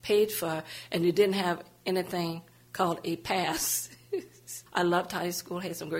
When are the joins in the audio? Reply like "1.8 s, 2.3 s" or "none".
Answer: 4.7 s

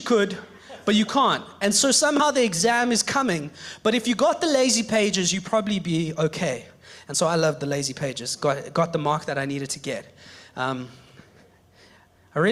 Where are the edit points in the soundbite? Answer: none

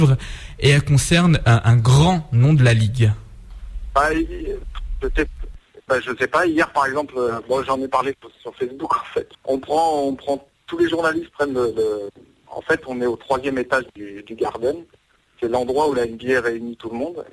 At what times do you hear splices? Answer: 9.3 s

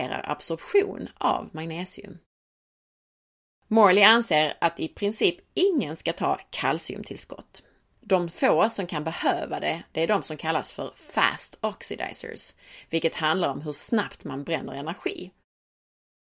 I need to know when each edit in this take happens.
none

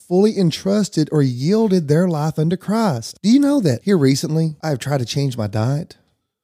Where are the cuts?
none

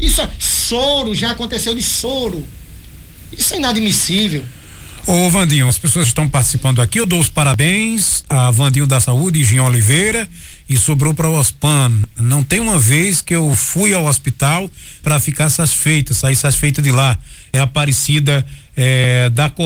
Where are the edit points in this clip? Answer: 5.7 s

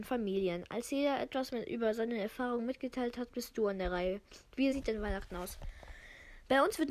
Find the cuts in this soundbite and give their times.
4.7 s

